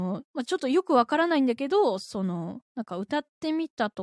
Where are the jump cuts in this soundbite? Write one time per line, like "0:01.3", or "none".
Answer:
0:02.7